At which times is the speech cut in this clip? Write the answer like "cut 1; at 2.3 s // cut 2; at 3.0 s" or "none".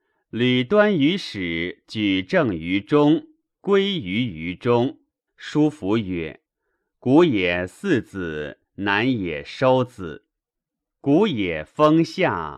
cut 1; at 5.3 s // cut 2; at 6.5 s